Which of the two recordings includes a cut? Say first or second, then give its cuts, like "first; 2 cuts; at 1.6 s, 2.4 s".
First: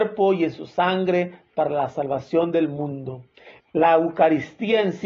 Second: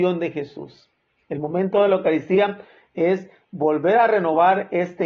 first; 1 cut; at 3.6 s